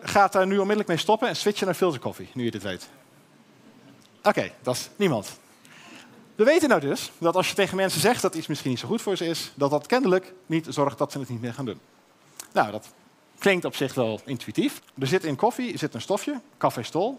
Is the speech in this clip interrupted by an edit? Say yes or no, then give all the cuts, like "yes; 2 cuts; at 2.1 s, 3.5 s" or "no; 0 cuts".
yes; 1 cut; at 14.8 s